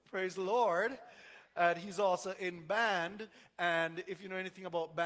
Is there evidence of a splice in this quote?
no; 0 cuts

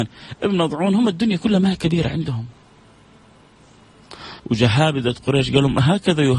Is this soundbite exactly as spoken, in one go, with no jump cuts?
no; 1 cut; at 4.4 s

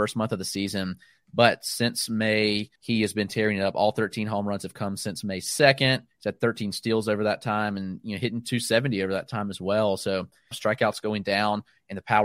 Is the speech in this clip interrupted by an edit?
yes; 2 cuts; at 2.8 s, 10.5 s

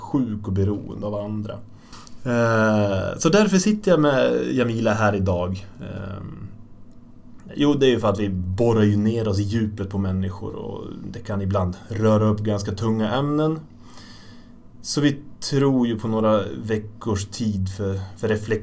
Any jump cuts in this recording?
yes; 1 cut; at 7.5 s

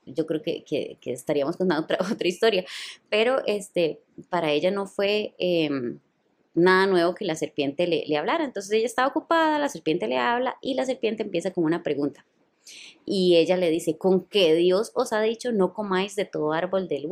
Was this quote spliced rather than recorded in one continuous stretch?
no; 0 cuts

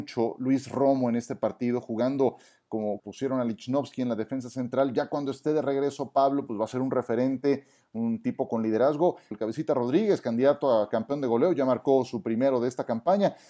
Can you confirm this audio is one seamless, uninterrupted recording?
no; 2 cuts; at 3.0 s, 9.3 s

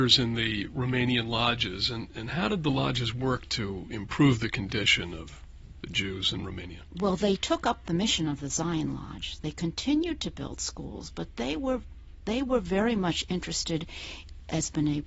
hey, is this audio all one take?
yes; 0 cuts

